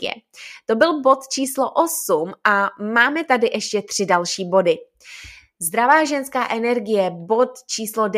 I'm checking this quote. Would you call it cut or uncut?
uncut